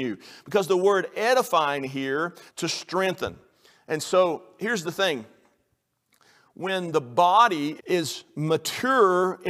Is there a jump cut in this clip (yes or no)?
yes